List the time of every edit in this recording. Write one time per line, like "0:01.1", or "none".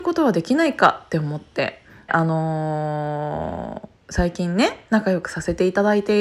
0:02.1
0:04.0